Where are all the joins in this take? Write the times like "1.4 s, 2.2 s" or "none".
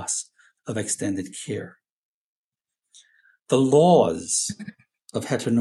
none